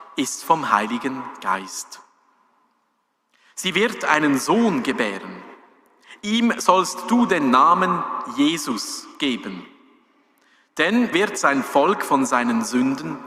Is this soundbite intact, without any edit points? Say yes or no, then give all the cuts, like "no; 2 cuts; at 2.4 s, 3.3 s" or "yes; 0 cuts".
no; 1 cut; at 11.1 s